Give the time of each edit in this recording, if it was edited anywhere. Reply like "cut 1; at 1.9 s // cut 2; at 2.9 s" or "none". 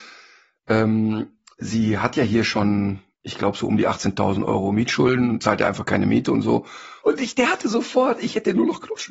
cut 1; at 7.0 s